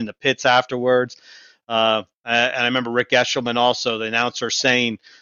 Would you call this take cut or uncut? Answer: uncut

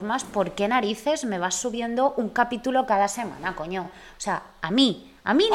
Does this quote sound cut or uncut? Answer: uncut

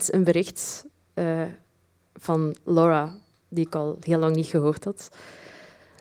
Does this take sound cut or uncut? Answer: uncut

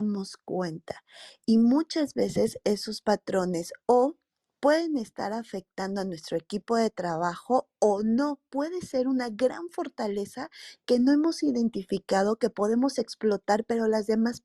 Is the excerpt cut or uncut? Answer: uncut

